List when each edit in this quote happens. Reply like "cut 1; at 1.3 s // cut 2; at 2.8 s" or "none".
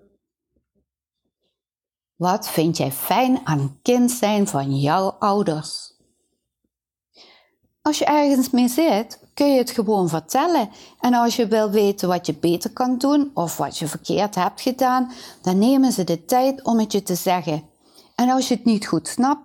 none